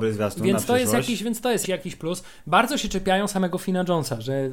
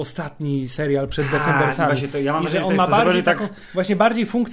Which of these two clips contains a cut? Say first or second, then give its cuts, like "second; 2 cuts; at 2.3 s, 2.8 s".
first; 1 cut; at 1.6 s